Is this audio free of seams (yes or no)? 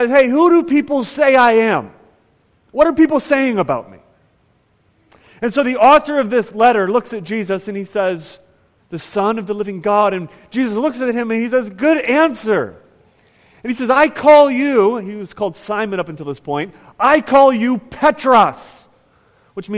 no